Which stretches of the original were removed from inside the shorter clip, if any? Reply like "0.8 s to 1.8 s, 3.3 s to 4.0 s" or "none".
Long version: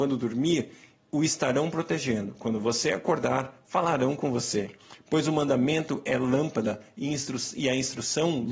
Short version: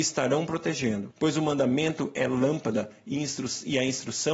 2.4 s to 5.0 s